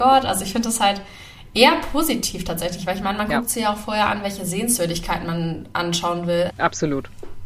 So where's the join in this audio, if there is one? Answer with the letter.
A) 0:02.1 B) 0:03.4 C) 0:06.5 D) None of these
C